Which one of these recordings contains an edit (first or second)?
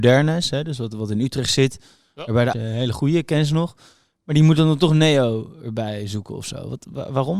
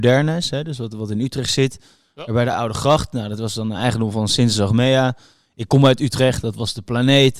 first